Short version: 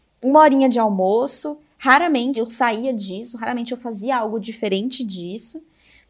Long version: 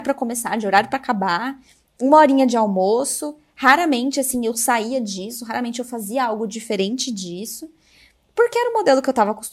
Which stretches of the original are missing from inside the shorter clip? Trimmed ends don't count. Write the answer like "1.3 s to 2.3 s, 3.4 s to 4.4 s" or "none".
4.1 s to 4.4 s